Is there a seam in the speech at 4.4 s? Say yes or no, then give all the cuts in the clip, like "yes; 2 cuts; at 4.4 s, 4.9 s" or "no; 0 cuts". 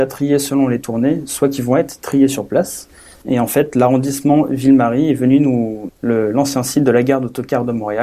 no; 2 cuts; at 3.2 s, 5.9 s